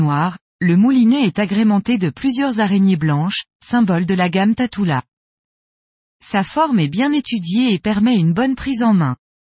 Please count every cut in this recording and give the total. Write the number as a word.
zero